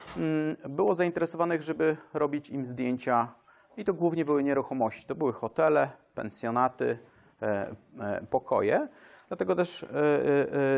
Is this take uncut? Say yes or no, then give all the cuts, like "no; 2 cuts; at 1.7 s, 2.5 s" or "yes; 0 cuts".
yes; 0 cuts